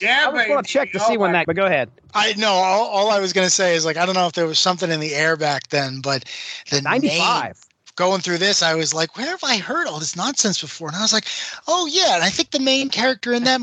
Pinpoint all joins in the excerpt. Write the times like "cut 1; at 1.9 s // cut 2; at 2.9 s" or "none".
cut 1; at 1.4 s